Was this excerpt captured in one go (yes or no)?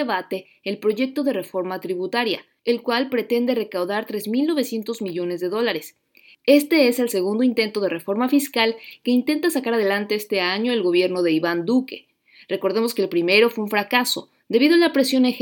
yes